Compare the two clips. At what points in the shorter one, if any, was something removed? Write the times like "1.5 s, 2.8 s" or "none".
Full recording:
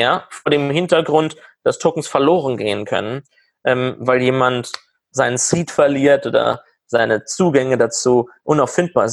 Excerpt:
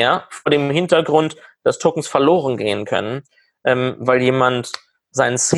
none